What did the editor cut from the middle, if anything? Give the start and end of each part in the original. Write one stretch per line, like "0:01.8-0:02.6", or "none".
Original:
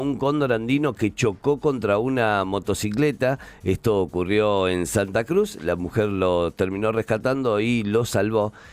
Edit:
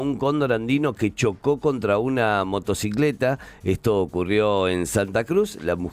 none